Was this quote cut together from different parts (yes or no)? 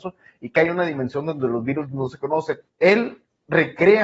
yes